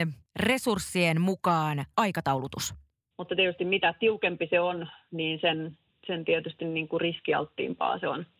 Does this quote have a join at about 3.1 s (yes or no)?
yes